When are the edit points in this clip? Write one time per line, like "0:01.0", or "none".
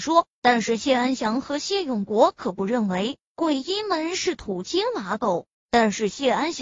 0:05.5